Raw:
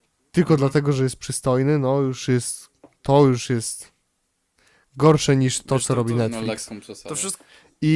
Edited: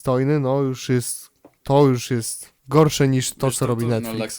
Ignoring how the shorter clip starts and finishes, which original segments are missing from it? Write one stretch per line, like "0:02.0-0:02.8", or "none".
0:04.0-0:04.9